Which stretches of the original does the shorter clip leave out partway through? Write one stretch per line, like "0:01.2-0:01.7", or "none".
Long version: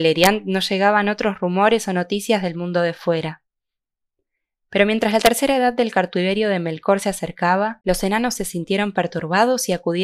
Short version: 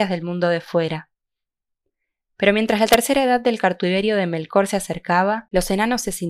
none